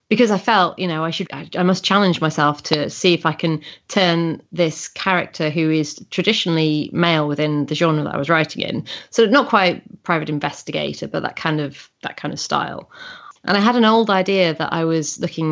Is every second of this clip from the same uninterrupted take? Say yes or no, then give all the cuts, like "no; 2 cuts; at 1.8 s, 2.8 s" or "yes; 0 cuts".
no; 2 cuts; at 1.3 s, 13.4 s